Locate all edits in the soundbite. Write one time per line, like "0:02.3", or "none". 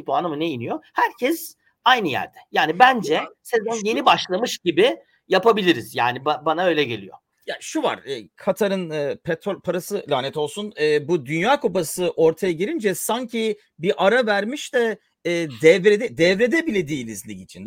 none